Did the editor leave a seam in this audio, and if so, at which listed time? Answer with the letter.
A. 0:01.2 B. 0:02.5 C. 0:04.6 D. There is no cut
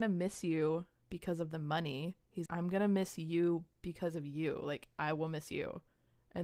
B